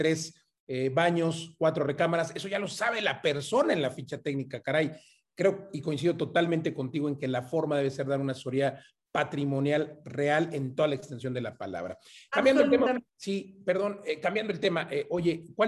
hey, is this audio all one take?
no; 1 cut; at 13.1 s

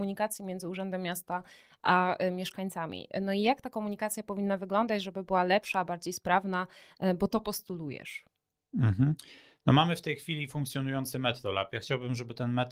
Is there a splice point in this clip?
no; 0 cuts

